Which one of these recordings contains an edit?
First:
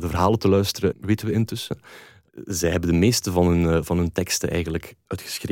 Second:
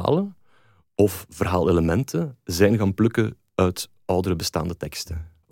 first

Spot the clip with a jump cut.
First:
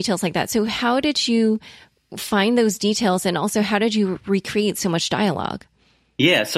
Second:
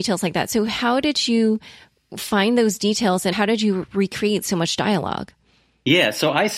second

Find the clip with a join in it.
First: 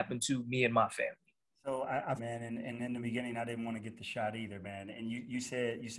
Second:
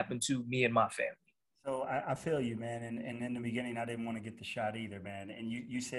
first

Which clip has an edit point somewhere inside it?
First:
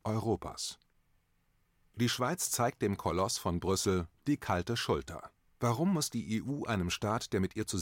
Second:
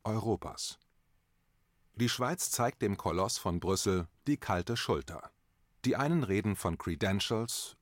first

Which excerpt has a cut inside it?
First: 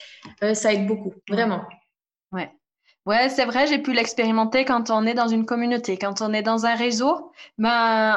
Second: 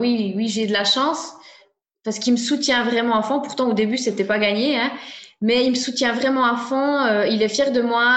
first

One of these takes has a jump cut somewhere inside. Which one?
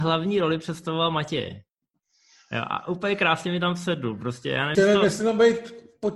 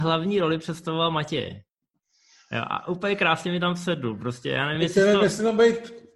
first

